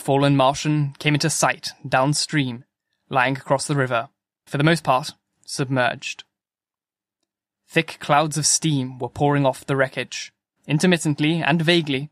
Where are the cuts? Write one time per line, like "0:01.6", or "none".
0:04.5
0:10.6